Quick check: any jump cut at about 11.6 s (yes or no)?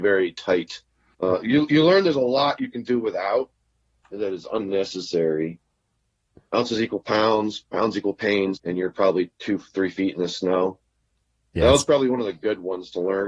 no